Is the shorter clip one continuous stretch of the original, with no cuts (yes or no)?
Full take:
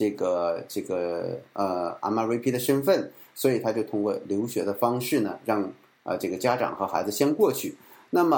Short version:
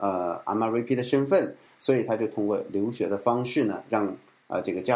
yes